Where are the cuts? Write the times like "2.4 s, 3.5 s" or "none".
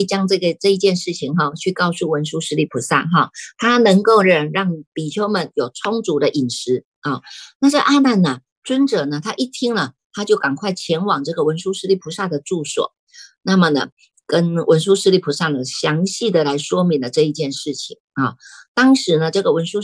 none